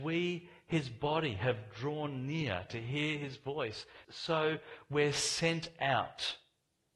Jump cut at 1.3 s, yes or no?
no